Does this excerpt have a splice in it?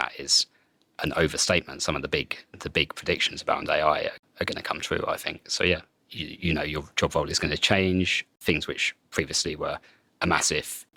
yes; 1 cut; at 6.0 s

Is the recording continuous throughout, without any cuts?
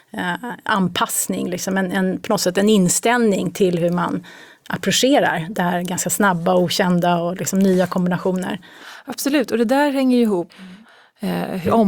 no; 1 cut; at 10.5 s

